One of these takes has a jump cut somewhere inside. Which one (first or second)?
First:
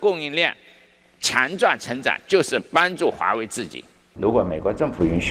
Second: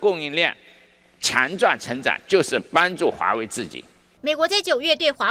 first